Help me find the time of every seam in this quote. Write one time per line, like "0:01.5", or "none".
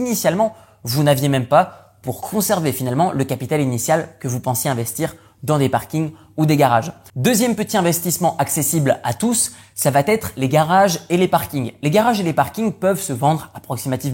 0:07.1